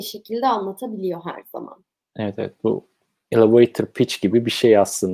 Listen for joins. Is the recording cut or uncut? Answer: uncut